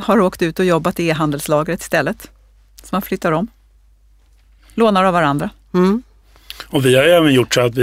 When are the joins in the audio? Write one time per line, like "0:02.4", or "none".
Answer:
none